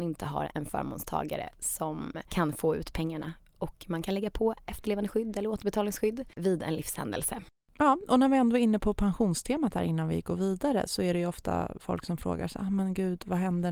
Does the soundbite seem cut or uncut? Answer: uncut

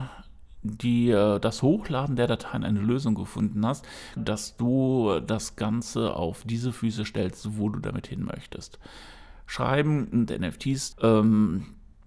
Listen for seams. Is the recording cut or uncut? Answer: cut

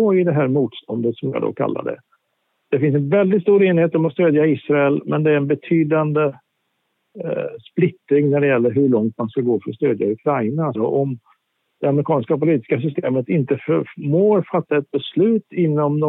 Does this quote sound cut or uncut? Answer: cut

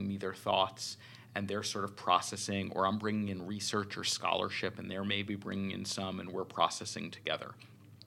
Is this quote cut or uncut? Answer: uncut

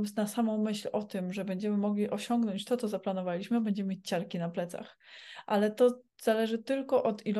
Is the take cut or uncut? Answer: uncut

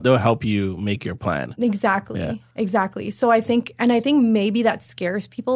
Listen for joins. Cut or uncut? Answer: uncut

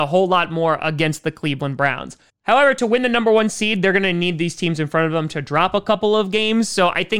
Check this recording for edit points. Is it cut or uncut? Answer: uncut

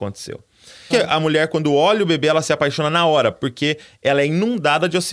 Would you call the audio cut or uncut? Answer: cut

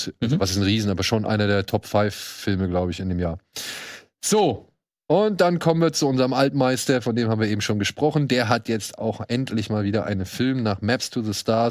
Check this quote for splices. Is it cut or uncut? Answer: uncut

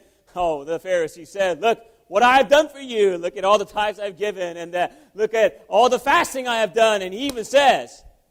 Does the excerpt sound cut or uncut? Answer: uncut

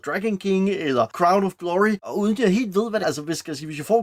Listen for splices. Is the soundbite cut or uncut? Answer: cut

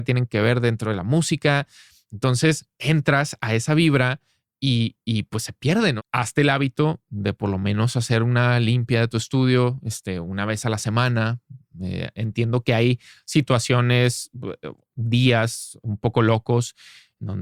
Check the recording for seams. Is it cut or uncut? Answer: cut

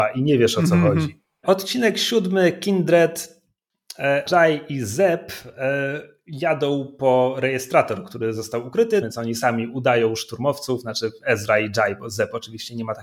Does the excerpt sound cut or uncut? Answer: cut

